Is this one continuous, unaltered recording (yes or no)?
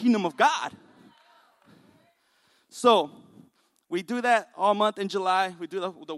yes